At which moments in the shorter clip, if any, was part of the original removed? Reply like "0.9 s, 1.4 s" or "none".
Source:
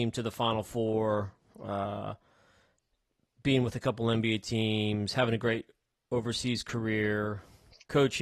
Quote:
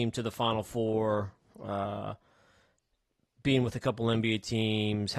none